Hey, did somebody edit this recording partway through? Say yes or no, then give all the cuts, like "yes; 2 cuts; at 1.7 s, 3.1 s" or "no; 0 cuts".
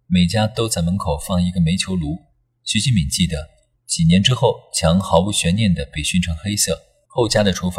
yes; 1 cut; at 3.8 s